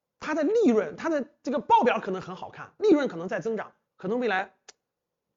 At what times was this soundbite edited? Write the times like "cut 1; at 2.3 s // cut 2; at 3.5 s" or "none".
cut 1; at 3.9 s